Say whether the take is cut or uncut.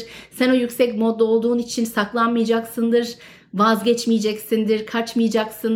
uncut